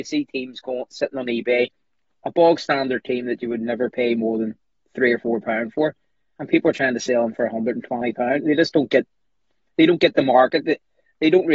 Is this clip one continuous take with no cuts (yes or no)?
yes